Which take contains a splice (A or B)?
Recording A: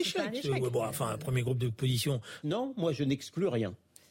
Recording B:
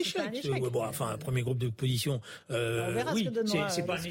A